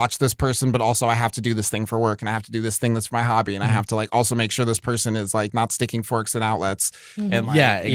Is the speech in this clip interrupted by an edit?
no; 0 cuts

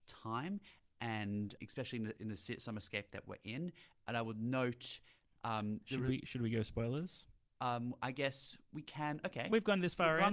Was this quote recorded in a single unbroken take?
no; 1 cut; at 1.6 s

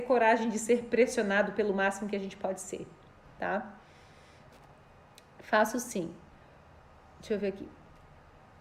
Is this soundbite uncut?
yes; 0 cuts

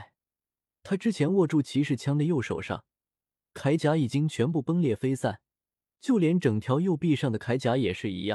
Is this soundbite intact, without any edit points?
yes; 0 cuts

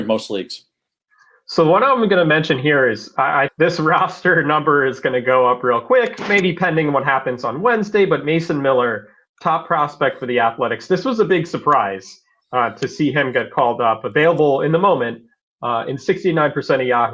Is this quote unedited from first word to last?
no; 1 cut; at 3.5 s

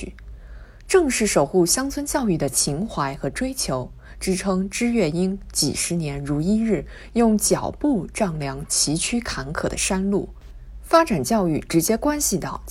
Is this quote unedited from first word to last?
yes; 0 cuts

